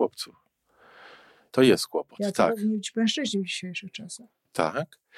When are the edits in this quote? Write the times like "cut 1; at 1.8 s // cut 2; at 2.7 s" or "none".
cut 1; at 1.5 s